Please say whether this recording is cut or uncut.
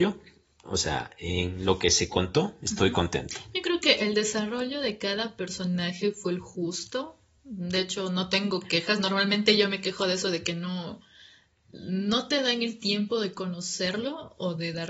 uncut